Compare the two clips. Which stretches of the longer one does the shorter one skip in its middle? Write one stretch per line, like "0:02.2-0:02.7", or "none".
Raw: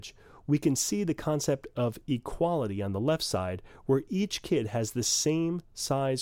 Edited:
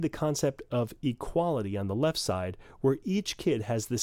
none